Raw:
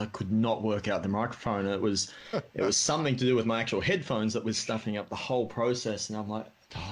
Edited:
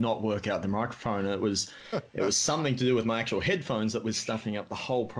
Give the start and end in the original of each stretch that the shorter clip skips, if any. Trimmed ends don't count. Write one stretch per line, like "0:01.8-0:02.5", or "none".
none